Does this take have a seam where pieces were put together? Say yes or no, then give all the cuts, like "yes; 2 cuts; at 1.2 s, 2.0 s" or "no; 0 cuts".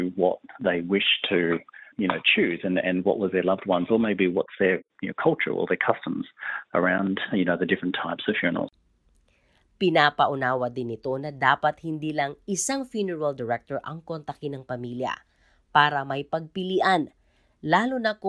no; 0 cuts